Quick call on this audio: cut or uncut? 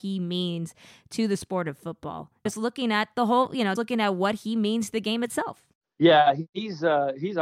cut